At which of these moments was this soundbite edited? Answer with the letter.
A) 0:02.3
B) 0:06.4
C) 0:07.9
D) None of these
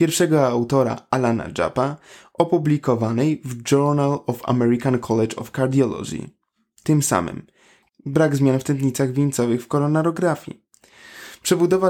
C